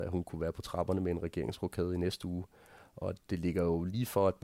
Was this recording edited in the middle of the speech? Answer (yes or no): no